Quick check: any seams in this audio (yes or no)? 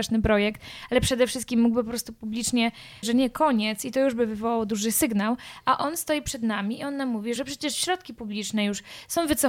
yes